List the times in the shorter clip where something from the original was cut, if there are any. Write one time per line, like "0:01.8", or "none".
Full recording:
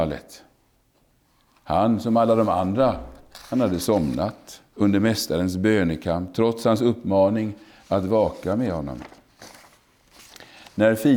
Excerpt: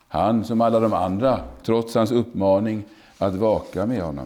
0:01.6